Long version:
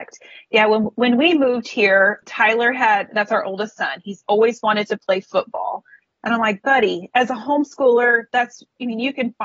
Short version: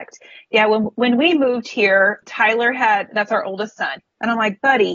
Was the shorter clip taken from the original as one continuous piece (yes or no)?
no